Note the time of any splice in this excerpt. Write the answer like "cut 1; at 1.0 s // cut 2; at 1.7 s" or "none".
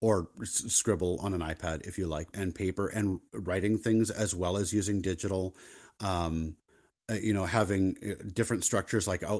cut 1; at 2.3 s